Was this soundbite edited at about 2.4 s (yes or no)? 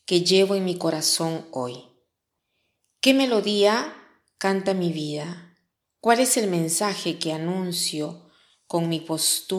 no